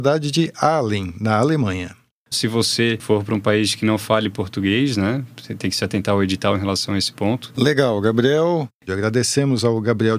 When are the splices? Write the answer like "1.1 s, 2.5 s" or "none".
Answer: 2.3 s, 7.5 s, 8.9 s